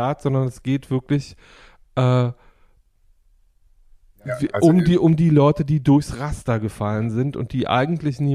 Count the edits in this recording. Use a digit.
0